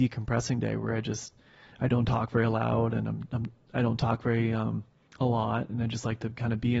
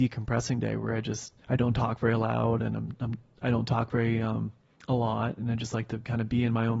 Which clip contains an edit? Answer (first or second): second